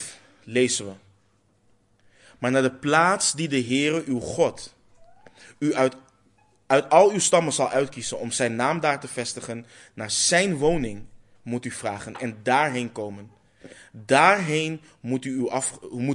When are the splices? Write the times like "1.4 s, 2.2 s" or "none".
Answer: none